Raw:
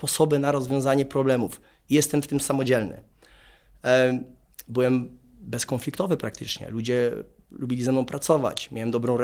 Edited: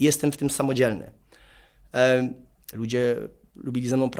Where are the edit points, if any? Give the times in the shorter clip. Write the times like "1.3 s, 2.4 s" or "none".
2.7 s